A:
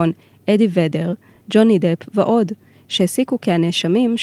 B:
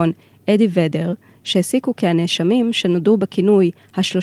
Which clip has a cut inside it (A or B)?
B